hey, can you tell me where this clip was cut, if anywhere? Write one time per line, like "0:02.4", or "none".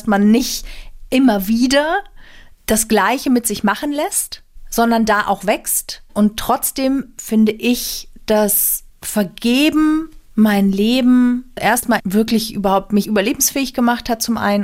0:11.6